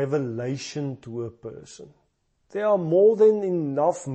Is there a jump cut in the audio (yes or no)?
no